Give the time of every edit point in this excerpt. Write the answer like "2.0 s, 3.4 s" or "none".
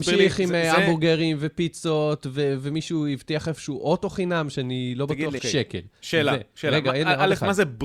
5.4 s